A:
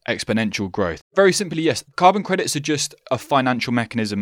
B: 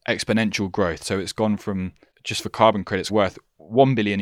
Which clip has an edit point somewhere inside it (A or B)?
A